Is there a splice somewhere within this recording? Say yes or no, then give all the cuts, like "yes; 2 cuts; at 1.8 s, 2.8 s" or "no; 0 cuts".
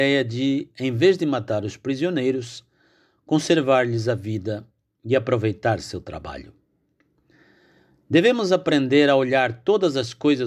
no; 0 cuts